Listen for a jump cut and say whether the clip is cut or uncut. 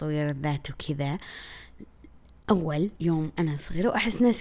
cut